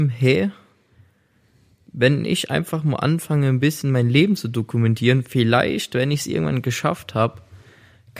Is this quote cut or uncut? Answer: uncut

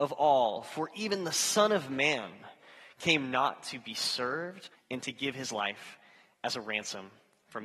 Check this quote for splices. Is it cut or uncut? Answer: cut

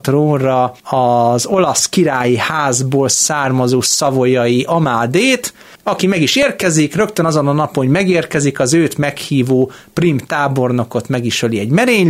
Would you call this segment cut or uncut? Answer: uncut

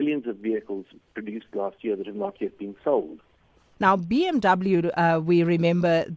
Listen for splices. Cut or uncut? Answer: cut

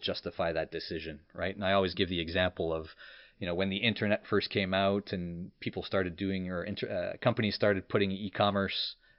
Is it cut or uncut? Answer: uncut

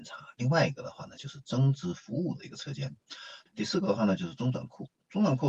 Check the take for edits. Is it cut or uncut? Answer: cut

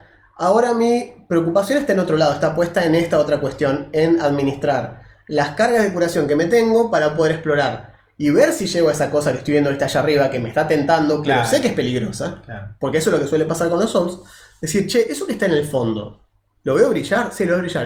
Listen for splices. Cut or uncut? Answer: uncut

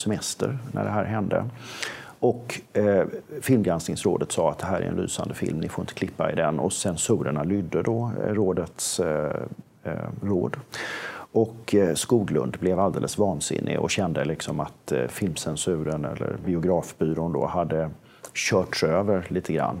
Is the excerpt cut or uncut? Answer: uncut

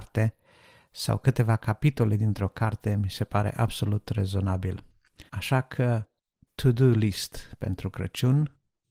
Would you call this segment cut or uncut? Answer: cut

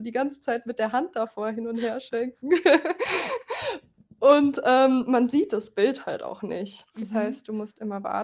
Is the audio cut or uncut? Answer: cut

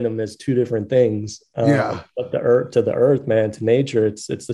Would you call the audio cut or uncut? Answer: uncut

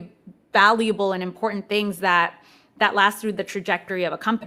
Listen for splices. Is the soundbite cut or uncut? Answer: uncut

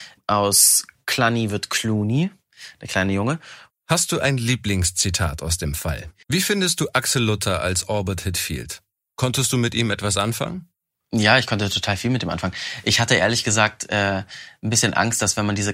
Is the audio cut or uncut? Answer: cut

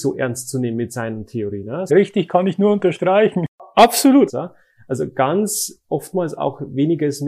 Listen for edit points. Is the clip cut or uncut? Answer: cut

